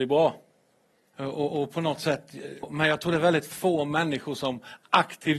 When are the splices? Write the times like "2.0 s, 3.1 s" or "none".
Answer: 1.1 s, 2.6 s